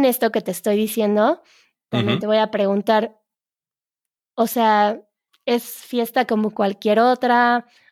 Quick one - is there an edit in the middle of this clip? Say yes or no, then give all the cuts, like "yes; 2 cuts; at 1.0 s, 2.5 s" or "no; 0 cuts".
no; 0 cuts